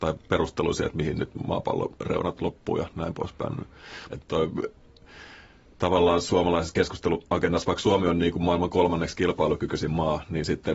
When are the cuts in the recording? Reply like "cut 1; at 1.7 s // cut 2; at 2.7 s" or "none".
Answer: cut 1; at 4.1 s